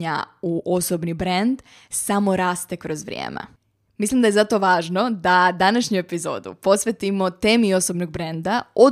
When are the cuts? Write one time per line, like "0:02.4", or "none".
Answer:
none

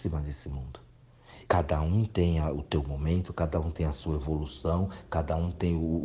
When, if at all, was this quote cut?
0:01.5

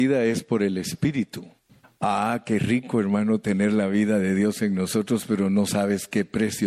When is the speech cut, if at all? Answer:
0:01.8

